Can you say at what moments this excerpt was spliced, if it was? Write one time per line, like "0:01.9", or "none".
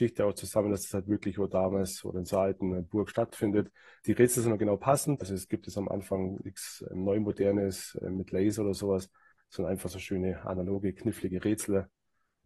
0:05.2